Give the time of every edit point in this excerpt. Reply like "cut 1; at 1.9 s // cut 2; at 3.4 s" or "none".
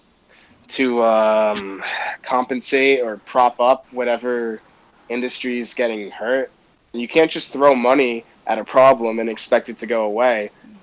cut 1; at 6.9 s

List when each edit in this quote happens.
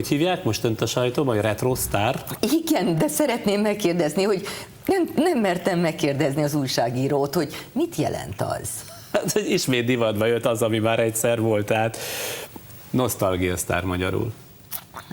none

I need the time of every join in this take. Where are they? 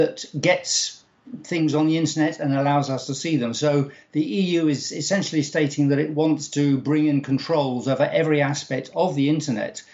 none

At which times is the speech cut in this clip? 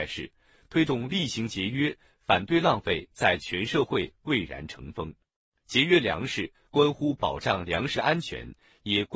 cut 1; at 5.5 s // cut 2; at 6.5 s

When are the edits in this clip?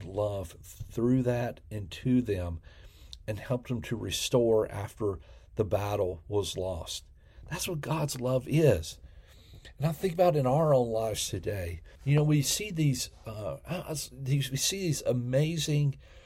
cut 1; at 12.0 s

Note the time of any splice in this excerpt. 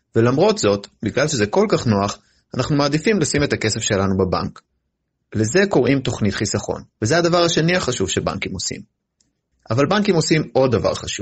cut 1; at 5.1 s // cut 2; at 6.9 s // cut 3; at 9.5 s

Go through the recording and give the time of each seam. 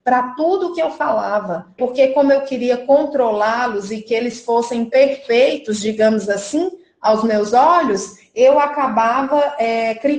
cut 1; at 1.8 s

